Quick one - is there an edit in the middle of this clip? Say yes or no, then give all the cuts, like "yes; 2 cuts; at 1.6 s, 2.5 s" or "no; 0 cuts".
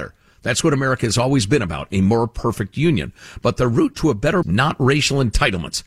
yes; 1 cut; at 4.4 s